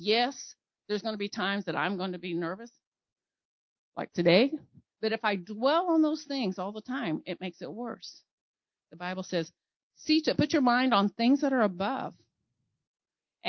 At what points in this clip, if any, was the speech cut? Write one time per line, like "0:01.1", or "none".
0:04.9

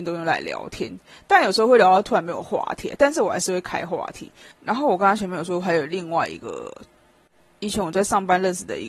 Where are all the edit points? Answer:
0:04.5

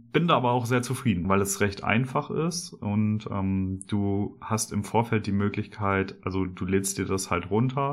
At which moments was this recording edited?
0:01.2

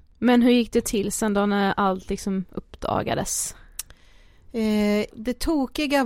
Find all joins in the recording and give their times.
0:05.1

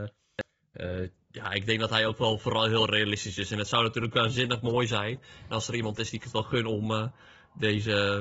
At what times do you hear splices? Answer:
none

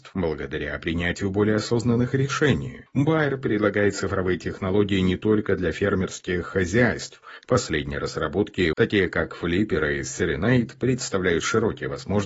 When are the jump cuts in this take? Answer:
0:07.4
0:08.7

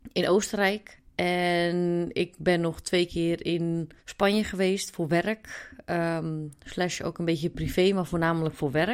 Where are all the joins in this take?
0:04.0

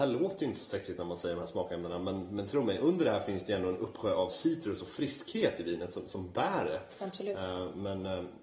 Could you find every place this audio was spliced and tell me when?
none

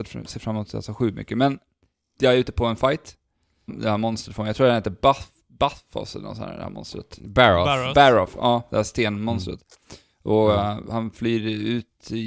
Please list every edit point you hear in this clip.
0:03.7

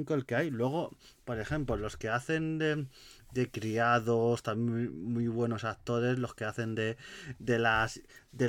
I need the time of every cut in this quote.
none

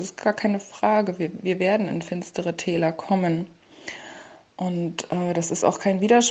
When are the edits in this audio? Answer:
none

